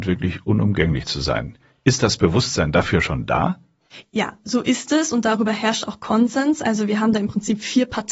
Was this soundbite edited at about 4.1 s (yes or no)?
no